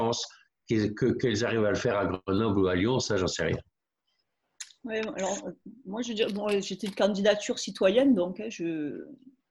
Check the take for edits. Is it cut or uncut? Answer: uncut